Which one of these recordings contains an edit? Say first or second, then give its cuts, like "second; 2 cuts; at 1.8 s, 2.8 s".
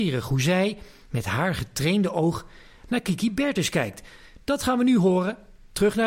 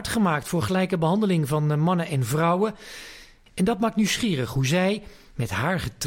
second; 1 cut; at 3.5 s